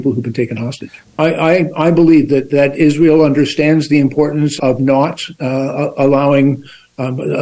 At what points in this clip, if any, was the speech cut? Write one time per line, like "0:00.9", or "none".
0:01.0
0:02.3
0:04.6